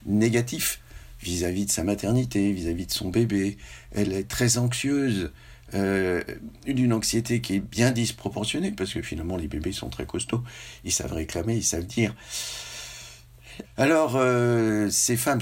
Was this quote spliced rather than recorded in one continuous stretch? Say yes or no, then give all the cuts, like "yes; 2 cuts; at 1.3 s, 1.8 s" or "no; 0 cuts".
yes; 1 cut; at 13.6 s